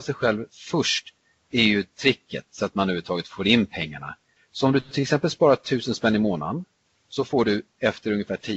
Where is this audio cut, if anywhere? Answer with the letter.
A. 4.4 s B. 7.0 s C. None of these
A